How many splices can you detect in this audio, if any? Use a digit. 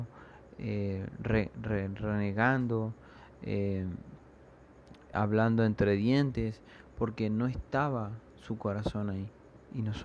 1